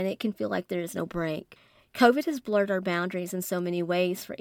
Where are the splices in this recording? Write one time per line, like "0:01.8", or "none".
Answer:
none